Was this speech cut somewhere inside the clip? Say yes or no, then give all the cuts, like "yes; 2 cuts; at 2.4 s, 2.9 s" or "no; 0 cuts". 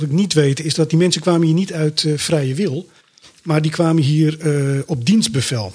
no; 0 cuts